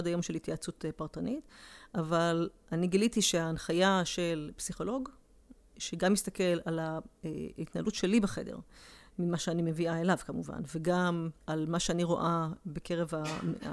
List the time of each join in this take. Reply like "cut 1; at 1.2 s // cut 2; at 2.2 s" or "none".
cut 1; at 11.4 s

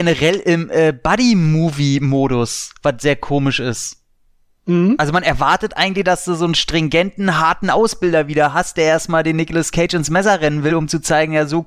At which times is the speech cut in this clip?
none

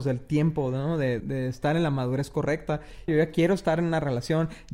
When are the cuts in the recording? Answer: cut 1; at 1.2 s // cut 2; at 3.1 s

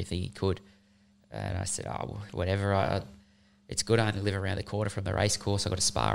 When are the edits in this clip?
cut 1; at 2.3 s

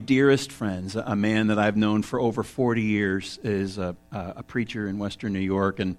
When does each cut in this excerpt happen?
none

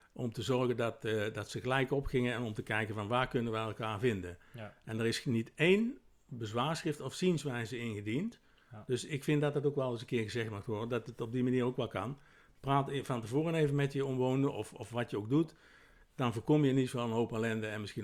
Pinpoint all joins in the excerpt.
none

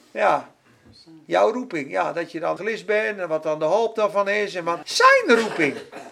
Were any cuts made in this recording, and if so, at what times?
cut 1; at 2.6 s // cut 2; at 4.8 s

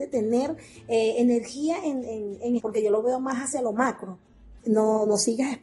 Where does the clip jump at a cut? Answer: cut 1; at 2.6 s // cut 2; at 4.6 s

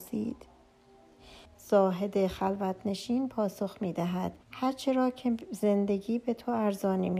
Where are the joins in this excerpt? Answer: cut 1; at 1.5 s // cut 2; at 4.4 s

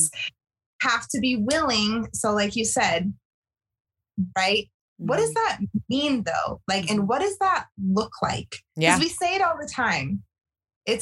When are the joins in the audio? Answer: cut 1; at 4.3 s

